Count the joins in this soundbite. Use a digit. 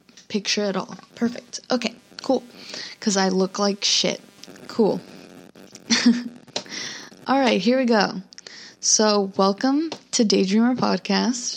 0